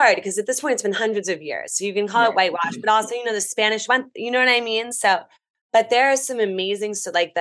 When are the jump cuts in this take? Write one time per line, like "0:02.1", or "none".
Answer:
none